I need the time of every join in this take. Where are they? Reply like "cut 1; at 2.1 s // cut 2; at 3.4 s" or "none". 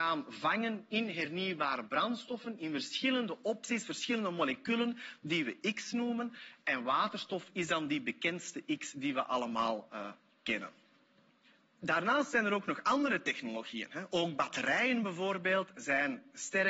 none